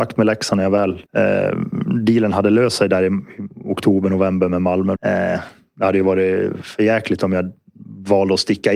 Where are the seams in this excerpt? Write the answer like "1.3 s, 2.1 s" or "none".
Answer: 1.1 s, 5.0 s

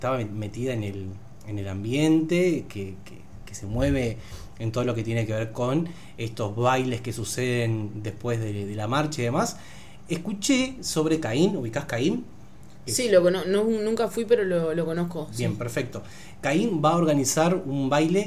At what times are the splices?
none

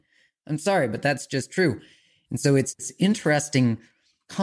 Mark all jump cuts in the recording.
2.2 s

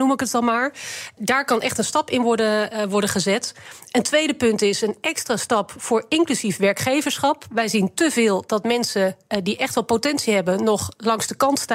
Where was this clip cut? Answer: 1.2 s

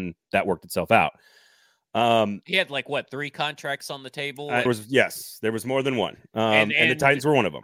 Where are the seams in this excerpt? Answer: 4.7 s

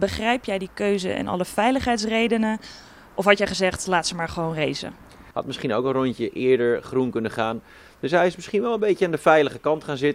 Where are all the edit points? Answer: 5.3 s

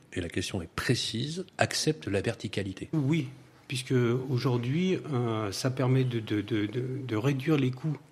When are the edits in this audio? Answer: 1.5 s, 2.9 s

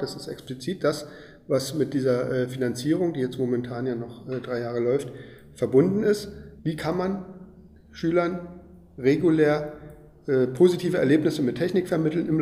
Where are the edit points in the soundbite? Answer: 6.6 s

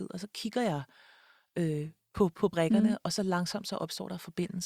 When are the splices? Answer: none

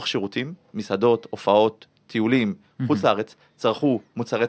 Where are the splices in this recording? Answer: none

